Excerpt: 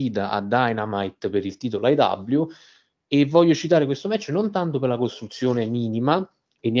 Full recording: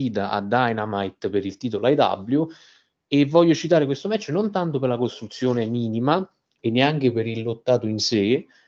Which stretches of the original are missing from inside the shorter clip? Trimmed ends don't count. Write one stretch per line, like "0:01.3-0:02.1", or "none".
none